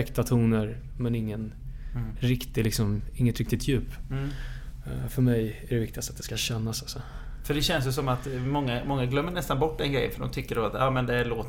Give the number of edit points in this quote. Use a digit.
0